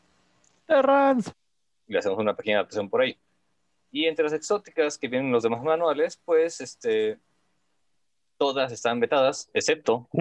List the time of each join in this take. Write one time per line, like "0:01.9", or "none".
none